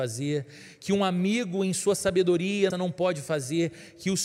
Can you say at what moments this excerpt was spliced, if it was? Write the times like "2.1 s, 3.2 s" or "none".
2.7 s

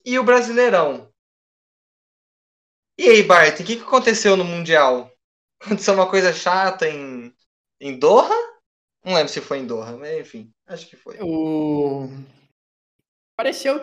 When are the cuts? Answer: none

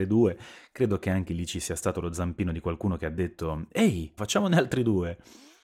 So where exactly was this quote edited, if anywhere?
4.2 s

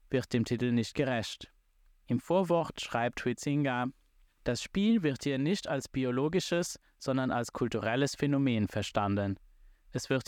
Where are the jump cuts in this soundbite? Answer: none

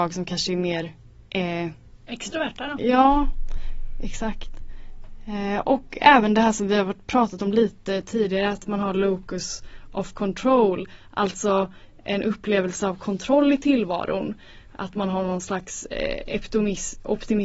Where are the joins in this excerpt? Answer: none

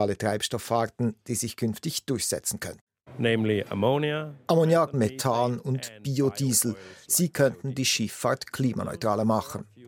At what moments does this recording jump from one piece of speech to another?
4.9 s

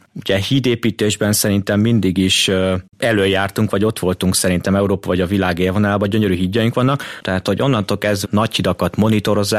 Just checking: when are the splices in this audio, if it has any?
7.2 s, 8.2 s

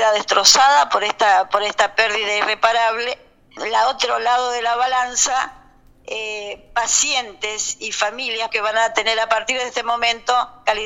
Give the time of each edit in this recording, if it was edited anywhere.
3.6 s, 8.5 s

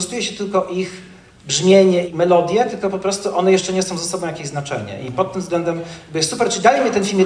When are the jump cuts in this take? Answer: 2.1 s

